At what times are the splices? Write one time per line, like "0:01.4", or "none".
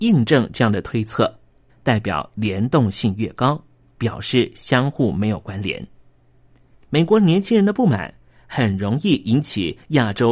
0:01.7
0:03.9
0:06.7